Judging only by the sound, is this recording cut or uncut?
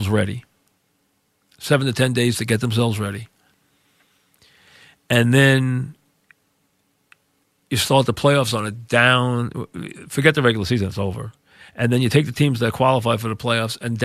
uncut